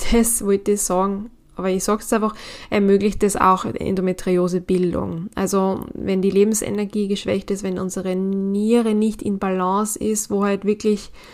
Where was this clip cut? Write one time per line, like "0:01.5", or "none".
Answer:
none